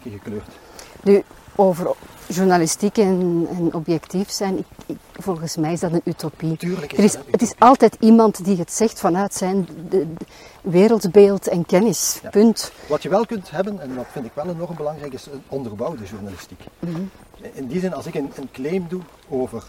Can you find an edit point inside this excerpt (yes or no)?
no